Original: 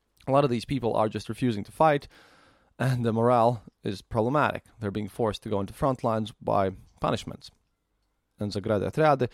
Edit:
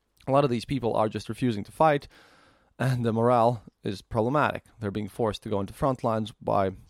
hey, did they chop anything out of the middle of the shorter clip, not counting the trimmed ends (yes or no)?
no